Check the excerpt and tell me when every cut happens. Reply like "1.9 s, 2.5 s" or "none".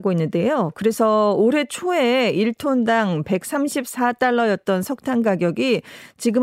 none